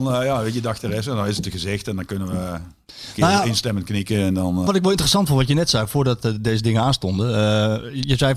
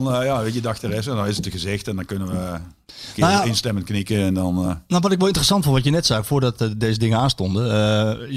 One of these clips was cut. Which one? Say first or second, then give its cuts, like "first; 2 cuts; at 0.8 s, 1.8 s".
first; 1 cut; at 4.7 s